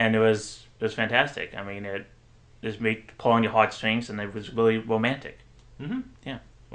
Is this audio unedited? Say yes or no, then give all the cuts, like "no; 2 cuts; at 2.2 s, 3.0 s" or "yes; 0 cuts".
yes; 0 cuts